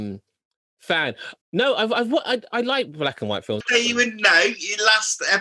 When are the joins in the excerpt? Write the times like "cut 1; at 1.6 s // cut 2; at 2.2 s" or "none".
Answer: cut 1; at 1.4 s // cut 2; at 2.5 s // cut 3; at 3.6 s